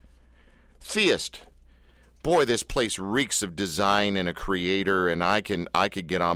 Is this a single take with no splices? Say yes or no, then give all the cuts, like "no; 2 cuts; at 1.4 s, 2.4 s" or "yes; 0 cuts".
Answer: yes; 0 cuts